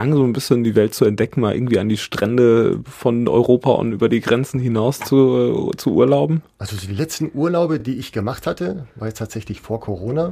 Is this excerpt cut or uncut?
uncut